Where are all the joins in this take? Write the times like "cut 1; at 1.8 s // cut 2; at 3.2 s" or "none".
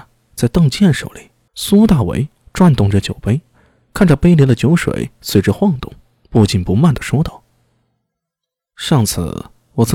cut 1; at 1.5 s